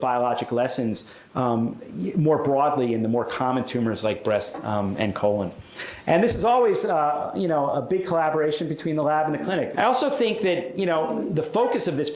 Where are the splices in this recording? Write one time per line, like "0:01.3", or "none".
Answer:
0:09.7